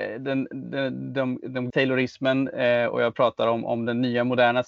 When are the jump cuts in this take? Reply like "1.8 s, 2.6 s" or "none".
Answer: 1.7 s